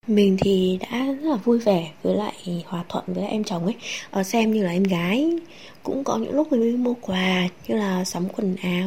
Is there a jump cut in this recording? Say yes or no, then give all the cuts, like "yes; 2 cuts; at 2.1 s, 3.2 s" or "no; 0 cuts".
no; 0 cuts